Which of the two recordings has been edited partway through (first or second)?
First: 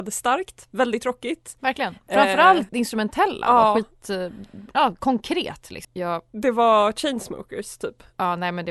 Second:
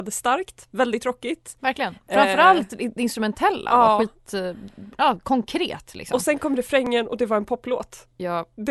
first